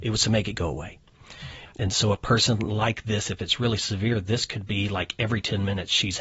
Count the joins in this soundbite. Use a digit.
1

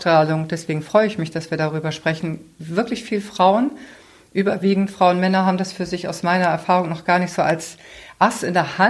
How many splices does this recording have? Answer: 0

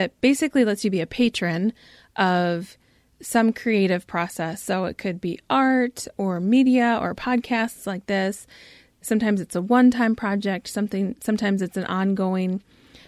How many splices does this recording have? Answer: 0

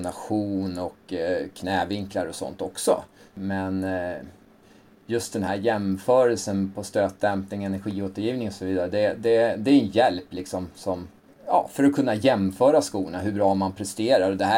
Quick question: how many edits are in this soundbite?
0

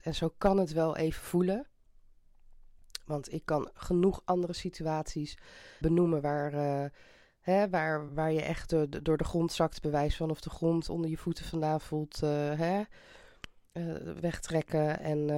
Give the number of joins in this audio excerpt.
2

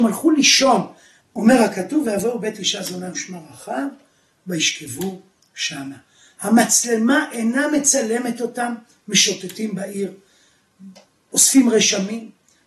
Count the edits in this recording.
1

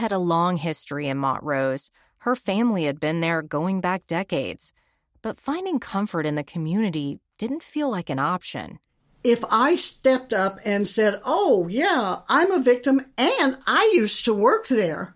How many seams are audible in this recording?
0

